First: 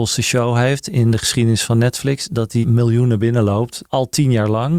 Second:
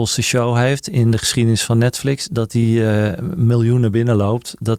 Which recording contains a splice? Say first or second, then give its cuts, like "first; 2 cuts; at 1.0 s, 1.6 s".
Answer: first; 2 cuts; at 2.6 s, 3.9 s